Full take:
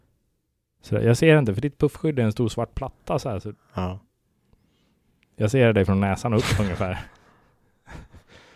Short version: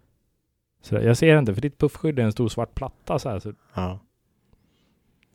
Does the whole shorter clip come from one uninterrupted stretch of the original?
yes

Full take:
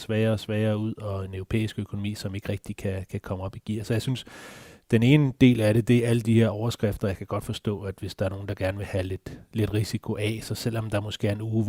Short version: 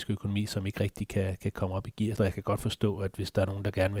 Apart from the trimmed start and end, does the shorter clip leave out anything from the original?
yes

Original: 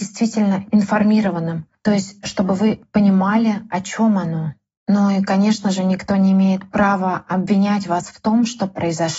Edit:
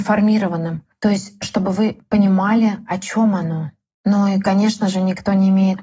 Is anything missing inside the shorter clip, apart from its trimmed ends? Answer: no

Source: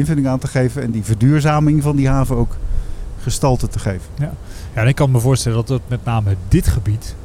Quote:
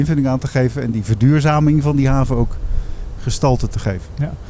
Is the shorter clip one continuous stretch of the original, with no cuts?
yes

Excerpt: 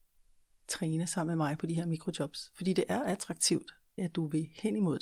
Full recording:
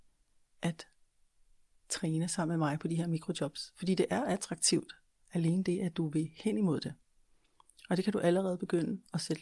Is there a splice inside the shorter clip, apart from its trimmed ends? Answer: yes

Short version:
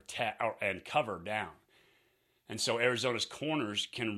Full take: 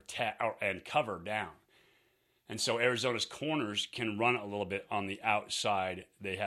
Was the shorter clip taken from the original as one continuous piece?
yes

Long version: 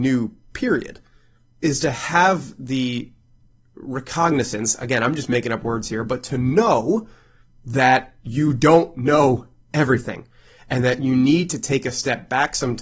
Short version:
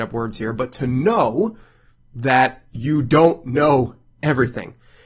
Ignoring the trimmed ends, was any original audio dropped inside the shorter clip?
no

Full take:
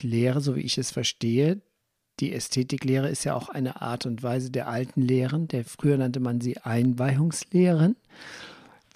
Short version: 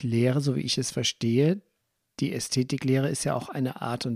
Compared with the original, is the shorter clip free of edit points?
yes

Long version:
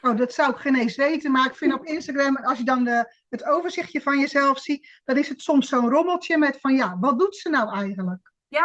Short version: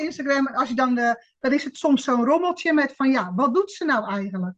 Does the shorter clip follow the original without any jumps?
no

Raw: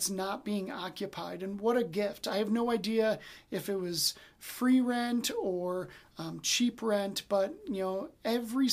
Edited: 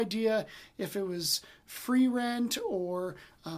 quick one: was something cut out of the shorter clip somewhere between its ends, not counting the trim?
no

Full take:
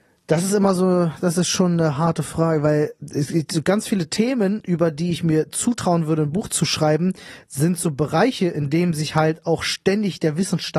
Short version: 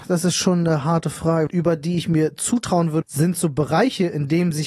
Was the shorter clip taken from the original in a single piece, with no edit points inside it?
no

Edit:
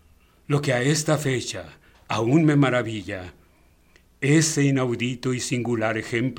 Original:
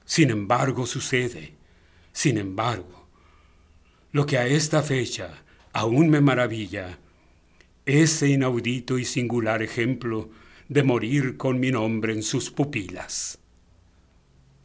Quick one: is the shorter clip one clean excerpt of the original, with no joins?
yes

